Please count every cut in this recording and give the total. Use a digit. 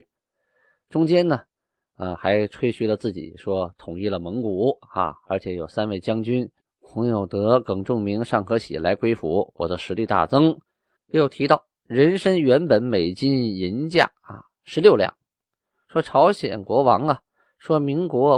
1